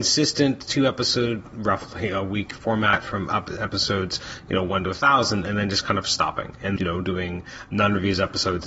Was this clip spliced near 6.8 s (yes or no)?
yes